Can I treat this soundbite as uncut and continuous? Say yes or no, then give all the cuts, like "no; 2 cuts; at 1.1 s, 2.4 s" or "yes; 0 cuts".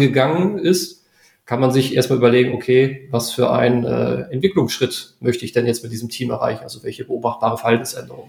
yes; 0 cuts